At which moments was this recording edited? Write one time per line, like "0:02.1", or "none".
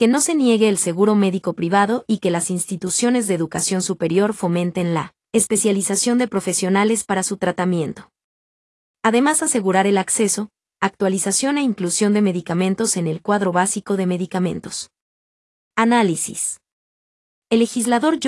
none